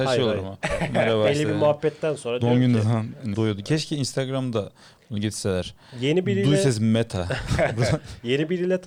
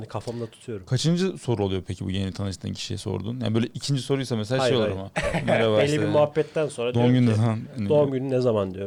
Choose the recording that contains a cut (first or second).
first